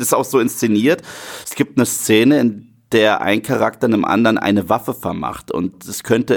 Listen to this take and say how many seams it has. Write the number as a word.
zero